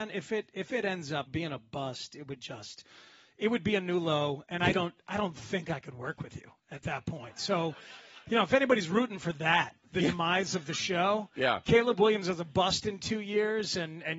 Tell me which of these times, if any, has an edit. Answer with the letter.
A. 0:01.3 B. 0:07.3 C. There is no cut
A